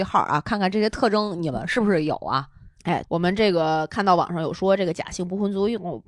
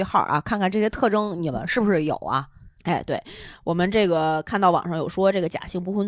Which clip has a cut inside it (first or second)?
first